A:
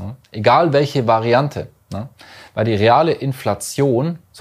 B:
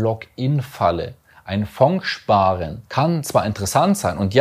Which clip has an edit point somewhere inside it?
B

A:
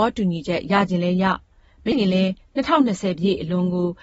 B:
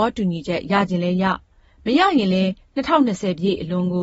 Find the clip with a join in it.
A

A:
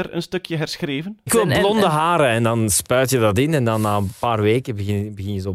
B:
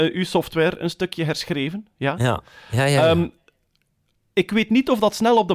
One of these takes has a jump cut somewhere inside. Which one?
A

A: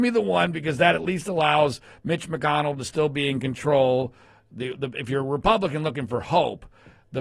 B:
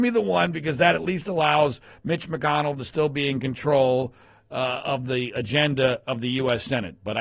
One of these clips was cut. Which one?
A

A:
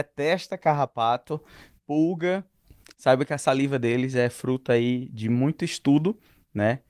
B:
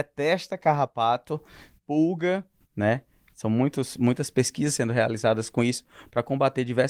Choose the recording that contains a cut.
B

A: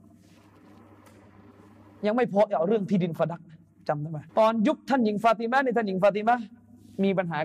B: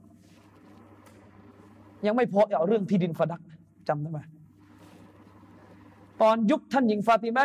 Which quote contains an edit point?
A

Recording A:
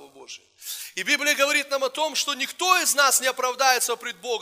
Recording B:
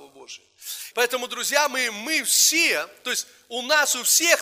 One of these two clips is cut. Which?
B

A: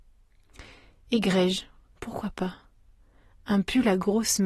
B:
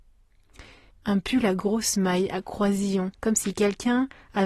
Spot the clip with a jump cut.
B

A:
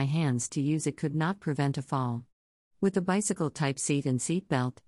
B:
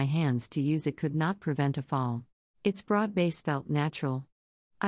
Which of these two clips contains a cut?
B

